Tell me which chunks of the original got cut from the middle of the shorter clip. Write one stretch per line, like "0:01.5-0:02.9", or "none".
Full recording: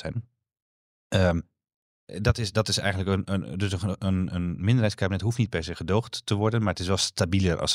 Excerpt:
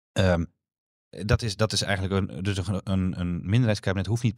0:03.3-0:03.4